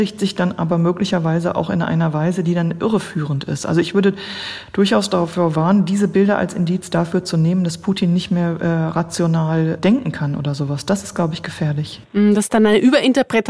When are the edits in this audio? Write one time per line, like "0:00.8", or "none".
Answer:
none